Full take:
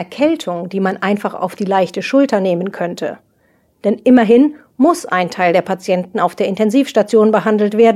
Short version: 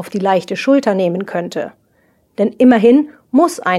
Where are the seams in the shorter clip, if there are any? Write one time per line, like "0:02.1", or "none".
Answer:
none